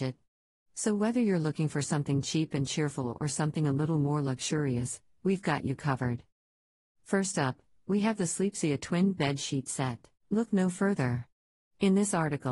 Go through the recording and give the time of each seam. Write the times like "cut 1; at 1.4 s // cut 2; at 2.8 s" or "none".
cut 1; at 10.2 s